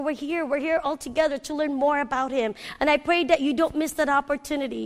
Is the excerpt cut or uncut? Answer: uncut